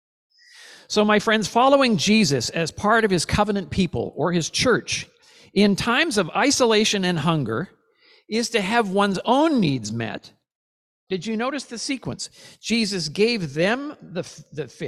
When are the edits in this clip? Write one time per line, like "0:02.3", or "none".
0:11.1